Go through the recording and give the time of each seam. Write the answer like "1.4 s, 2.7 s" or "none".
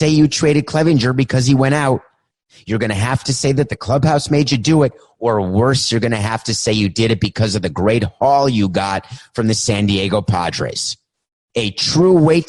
none